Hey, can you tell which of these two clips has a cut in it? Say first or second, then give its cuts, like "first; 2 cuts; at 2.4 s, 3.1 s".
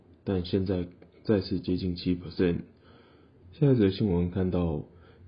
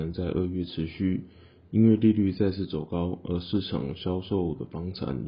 first; 1 cut; at 3.4 s